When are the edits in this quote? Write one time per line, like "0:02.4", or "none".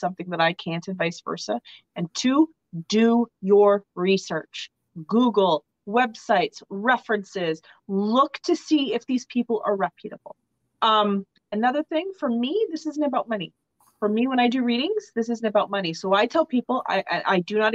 0:10.7